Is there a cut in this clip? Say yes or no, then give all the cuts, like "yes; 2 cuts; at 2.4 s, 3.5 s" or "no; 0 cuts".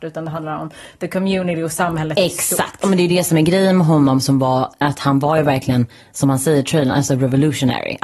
yes; 1 cut; at 4.8 s